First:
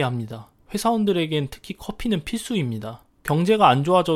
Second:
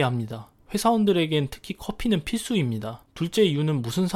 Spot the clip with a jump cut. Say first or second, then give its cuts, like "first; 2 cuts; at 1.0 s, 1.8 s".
second; 1 cut; at 3.0 s